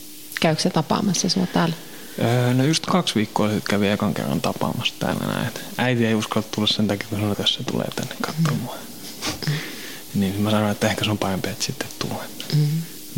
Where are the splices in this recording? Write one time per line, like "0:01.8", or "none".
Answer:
0:07.3